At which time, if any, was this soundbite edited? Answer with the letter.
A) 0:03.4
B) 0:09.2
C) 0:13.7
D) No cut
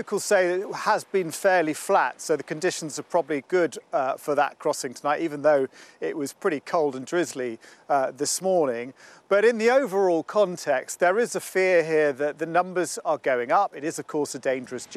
A